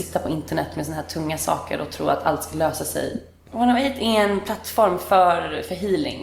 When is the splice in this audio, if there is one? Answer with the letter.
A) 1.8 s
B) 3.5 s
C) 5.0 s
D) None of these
B